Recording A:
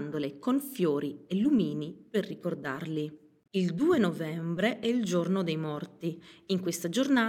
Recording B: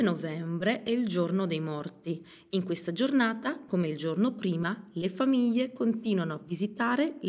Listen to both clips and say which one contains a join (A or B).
A